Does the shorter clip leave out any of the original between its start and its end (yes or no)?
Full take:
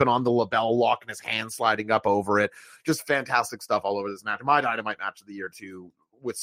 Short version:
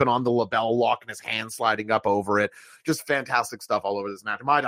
no